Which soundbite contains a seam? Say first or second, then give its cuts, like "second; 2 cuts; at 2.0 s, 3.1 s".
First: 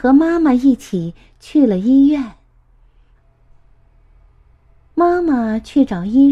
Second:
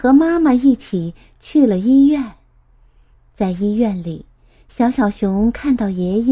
first; 1 cut; at 3.1 s